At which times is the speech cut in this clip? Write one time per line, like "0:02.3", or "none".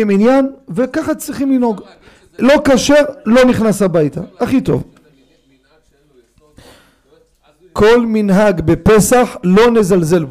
none